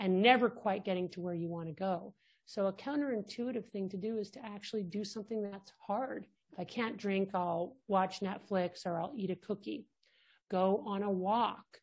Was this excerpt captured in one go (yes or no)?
no